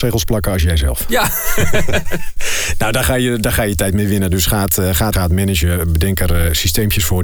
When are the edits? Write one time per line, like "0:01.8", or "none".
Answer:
0:05.1